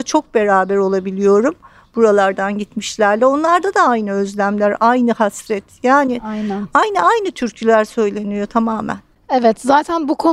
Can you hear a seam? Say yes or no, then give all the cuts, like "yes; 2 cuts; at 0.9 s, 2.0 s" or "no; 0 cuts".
no; 0 cuts